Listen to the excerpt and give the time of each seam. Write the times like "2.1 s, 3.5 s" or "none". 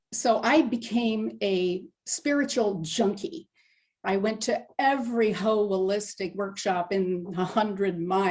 4.0 s